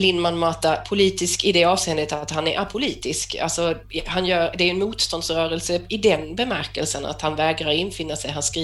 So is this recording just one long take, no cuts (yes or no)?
yes